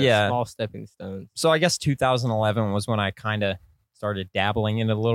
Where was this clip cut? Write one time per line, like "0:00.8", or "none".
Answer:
none